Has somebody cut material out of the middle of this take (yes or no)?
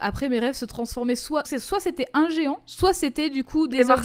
yes